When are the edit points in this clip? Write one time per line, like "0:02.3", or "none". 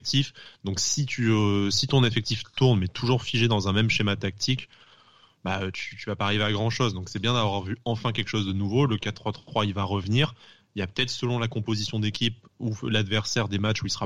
none

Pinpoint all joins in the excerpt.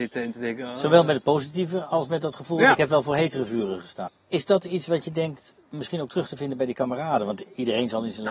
0:04.1

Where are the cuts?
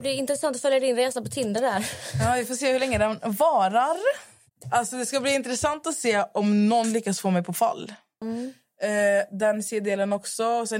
0:04.6
0:08.2

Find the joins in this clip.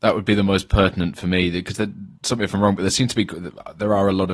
0:02.1

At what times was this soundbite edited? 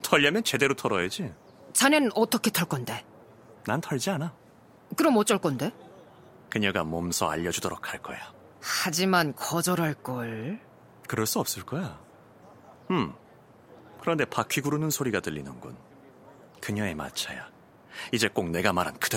none

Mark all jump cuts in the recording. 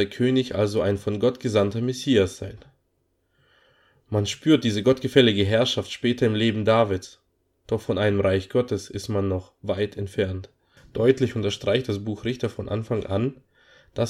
none

